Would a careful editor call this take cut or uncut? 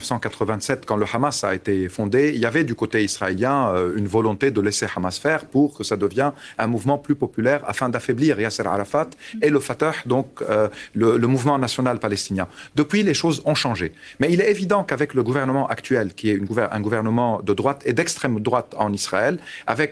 uncut